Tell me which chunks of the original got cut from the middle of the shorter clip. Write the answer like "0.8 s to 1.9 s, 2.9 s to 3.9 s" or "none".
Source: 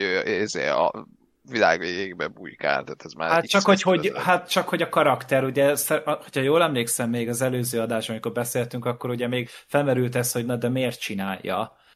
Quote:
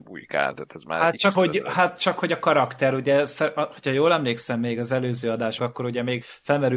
3.6 s to 3.8 s, 8.1 s to 8.8 s